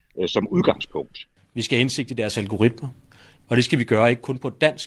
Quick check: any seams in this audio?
yes; 2 cuts; at 1.4 s, 3.4 s

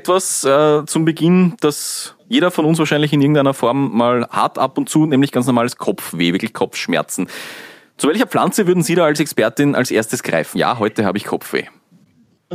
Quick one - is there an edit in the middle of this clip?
yes; 1 cut; at 10.6 s

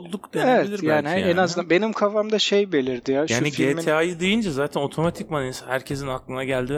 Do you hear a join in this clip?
no; 0 cuts

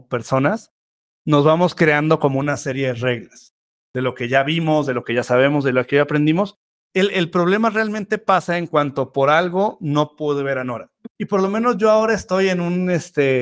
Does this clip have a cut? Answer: yes; 2 cuts; at 6.9 s, 11.1 s

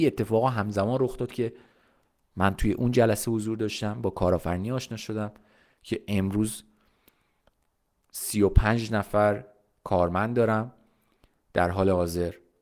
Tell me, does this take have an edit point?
no; 0 cuts

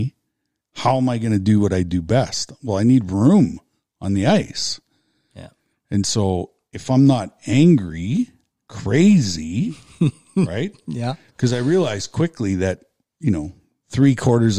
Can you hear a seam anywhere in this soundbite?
no; 0 cuts

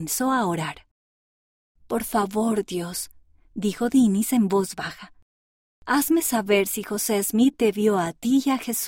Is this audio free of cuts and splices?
no; 1 cut; at 7.5 s

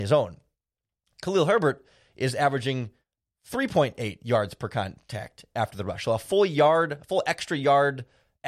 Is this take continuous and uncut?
yes; 0 cuts

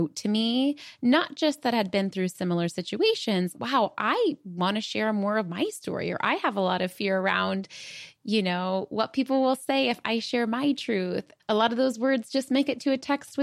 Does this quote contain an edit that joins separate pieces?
yes; 2 cuts; at 3.5 s, 11.4 s

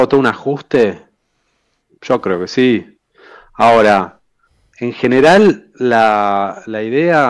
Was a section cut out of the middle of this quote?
no; 0 cuts

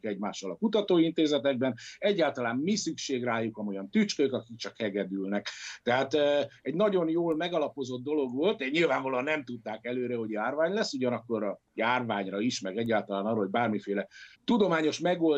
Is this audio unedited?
no; 1 cut; at 14.3 s

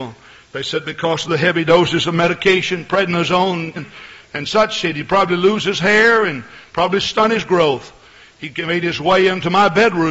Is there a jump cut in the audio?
yes; 1 cut; at 3.8 s

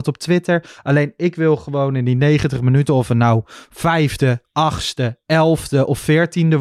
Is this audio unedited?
yes; 0 cuts

